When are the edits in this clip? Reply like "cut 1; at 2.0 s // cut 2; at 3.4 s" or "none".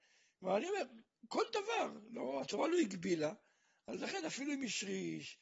none